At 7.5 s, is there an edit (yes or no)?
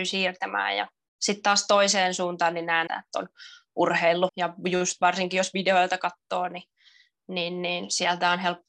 no